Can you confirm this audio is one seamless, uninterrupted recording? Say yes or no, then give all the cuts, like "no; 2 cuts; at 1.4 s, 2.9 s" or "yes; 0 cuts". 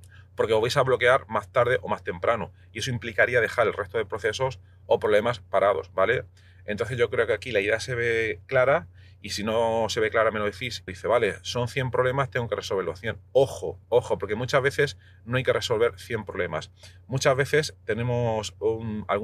no; 2 cuts; at 10.9 s, 13.8 s